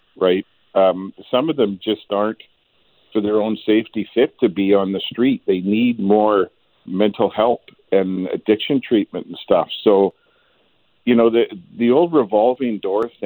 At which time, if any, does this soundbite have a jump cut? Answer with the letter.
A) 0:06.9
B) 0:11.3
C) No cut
A